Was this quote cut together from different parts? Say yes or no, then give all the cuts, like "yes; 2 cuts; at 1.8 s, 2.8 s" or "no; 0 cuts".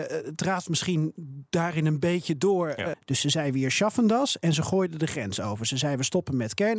yes; 1 cut; at 2.9 s